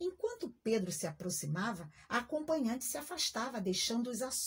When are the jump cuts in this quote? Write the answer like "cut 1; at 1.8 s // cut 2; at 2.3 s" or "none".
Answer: none